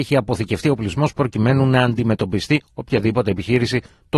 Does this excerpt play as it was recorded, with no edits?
yes; 0 cuts

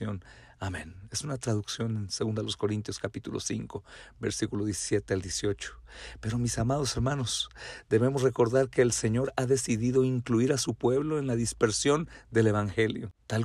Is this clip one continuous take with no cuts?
yes; 0 cuts

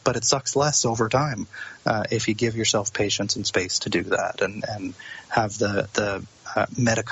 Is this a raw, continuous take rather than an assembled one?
yes; 0 cuts

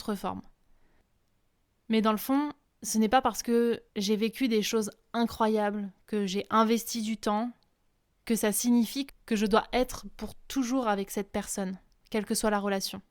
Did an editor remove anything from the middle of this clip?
yes; 2 cuts; at 6.0 s, 12.0 s

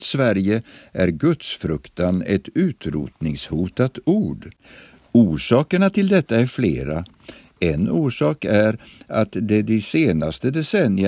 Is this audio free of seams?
yes; 0 cuts

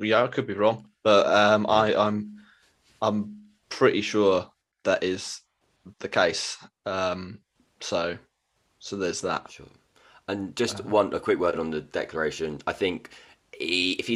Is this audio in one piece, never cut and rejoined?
no; 1 cut; at 5.9 s

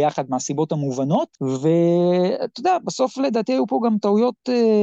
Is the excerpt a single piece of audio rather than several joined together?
no; 1 cut; at 1.4 s

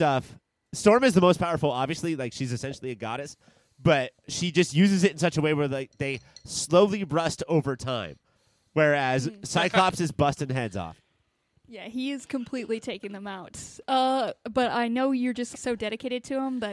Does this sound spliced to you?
yes; 2 cuts; at 14.4 s, 15.5 s

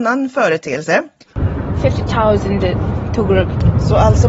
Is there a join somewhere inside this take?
yes; 1 cut; at 1.8 s

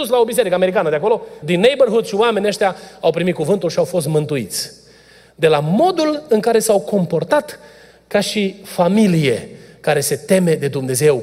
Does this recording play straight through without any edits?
no; 1 cut; at 1.4 s

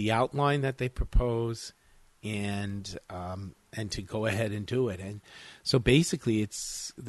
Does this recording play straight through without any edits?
yes; 0 cuts

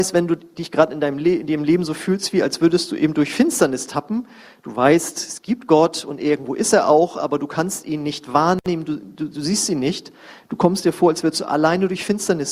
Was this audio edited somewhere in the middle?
no; 0 cuts

